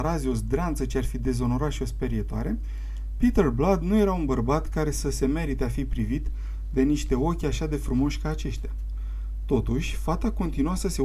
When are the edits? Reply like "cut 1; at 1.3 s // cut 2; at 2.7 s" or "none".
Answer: none